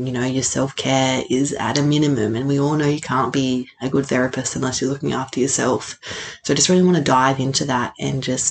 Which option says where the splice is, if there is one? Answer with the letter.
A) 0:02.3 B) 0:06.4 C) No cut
C